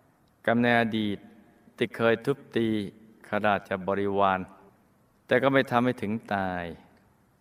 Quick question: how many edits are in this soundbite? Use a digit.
0